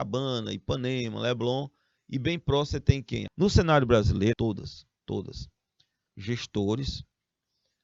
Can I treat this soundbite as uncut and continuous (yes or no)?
no